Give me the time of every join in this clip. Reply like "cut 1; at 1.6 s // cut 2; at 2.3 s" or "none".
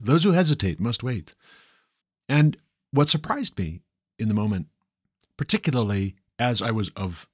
none